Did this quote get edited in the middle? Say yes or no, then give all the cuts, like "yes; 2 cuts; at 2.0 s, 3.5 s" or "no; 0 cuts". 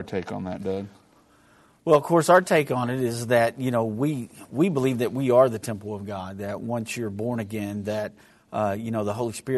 no; 0 cuts